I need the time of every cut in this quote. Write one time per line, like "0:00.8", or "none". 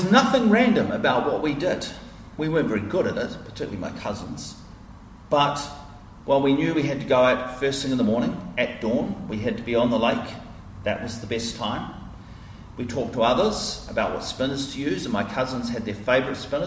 none